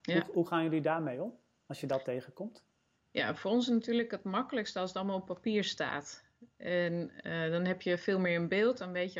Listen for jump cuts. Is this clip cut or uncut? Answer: uncut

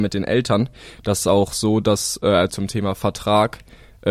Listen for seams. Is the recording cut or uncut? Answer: cut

